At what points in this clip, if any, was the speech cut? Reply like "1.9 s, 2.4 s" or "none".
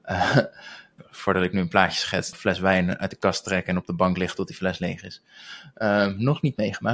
1.0 s, 2.3 s

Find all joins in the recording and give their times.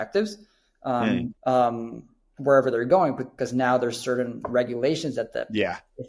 1.4 s

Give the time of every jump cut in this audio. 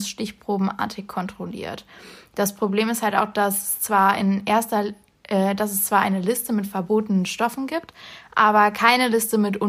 none

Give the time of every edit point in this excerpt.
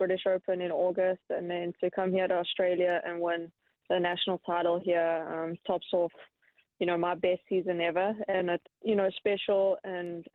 5.6 s, 8.6 s

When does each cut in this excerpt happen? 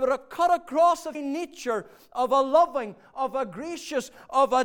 1.1 s

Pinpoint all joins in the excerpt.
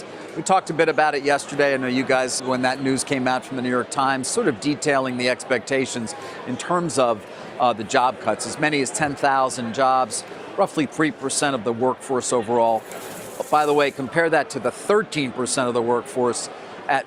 2.4 s

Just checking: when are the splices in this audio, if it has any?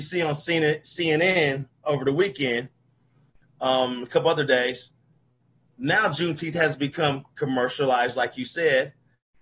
none

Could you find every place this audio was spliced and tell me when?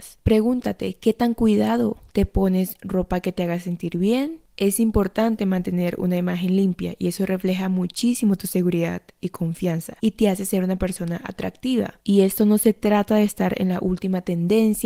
2.1 s

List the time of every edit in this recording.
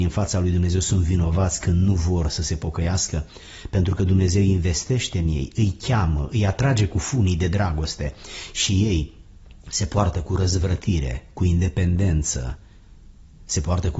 none

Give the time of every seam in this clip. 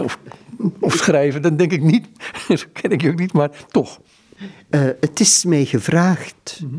none

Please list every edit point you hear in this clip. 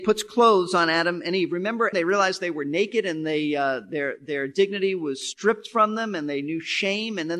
1.9 s

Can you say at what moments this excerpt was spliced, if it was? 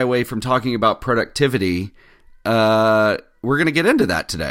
none

